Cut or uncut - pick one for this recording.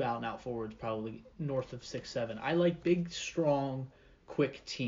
cut